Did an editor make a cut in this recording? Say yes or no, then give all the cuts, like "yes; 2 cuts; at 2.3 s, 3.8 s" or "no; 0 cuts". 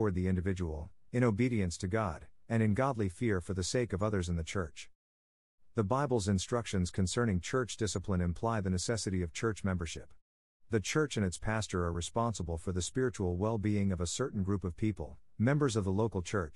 no; 0 cuts